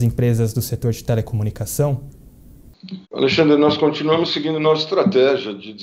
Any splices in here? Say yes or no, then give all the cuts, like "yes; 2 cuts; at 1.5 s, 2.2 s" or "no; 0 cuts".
yes; 1 cut; at 3.0 s